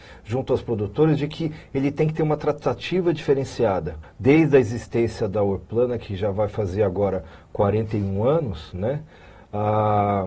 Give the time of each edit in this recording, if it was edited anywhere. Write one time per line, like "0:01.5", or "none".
0:04.0